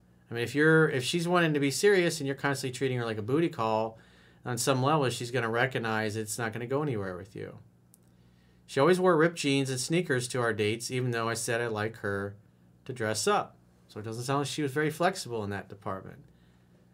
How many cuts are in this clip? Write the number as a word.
zero